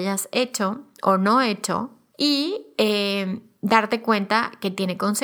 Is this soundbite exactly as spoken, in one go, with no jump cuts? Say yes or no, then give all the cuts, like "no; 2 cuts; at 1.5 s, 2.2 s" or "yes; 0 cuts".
no; 1 cut; at 2.1 s